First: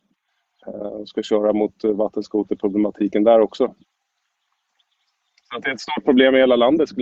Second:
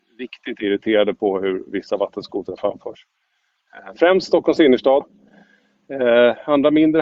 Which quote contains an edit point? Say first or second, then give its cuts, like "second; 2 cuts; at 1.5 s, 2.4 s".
second; 1 cut; at 5.0 s